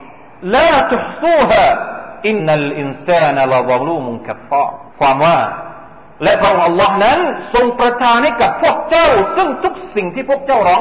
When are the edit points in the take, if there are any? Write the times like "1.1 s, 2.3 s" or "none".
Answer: 2.4 s, 4.9 s